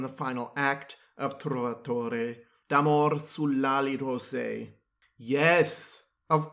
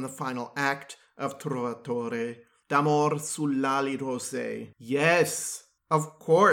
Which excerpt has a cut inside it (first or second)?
second